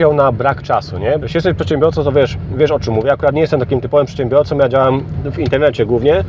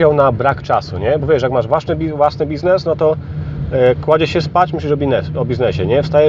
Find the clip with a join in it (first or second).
first